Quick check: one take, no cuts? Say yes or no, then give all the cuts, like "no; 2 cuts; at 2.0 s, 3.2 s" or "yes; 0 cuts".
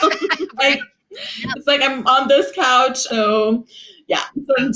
no; 1 cut; at 3.1 s